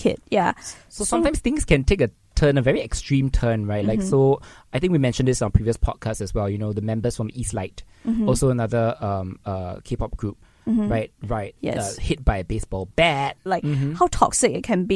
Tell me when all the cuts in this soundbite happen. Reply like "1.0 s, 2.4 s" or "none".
11.2 s, 13.5 s